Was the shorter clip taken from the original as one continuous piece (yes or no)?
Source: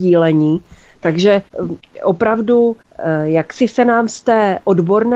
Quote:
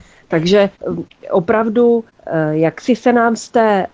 yes